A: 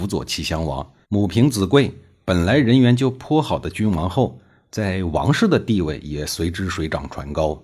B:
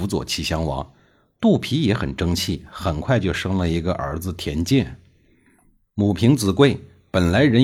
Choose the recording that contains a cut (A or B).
A